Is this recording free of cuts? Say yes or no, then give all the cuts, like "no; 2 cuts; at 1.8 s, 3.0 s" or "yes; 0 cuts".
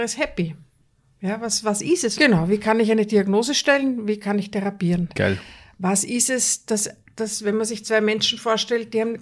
no; 2 cuts; at 2.2 s, 5.1 s